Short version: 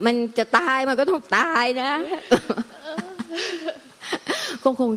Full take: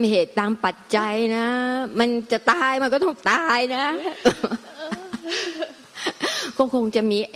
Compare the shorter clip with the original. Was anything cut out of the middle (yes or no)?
no